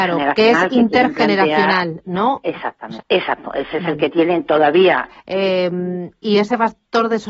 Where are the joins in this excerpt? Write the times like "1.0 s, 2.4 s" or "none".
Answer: 3.0 s, 5.1 s